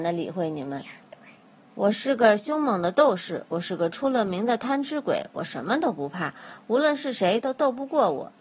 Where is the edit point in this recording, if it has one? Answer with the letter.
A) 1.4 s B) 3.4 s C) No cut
C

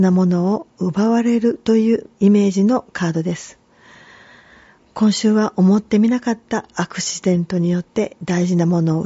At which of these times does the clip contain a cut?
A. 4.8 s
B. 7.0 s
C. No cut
C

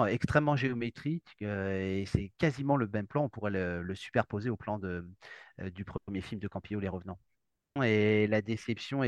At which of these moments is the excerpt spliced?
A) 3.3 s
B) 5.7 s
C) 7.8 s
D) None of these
C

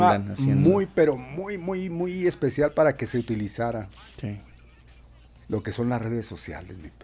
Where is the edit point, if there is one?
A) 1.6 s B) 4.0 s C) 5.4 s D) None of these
D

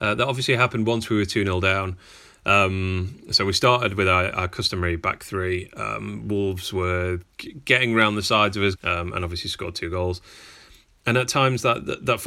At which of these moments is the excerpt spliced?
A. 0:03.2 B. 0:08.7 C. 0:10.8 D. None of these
B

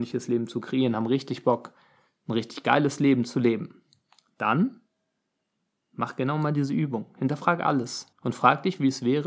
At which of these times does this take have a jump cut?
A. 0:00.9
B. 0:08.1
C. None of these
B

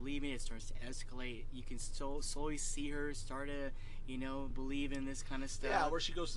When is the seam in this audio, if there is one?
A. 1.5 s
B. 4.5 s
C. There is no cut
B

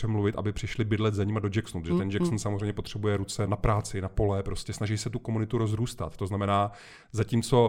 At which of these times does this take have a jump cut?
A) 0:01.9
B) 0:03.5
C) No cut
B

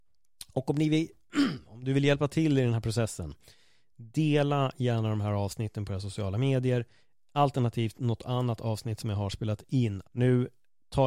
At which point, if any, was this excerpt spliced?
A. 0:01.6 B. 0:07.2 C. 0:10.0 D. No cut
C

